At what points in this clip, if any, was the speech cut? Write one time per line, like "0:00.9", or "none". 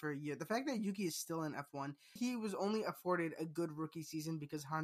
0:02.2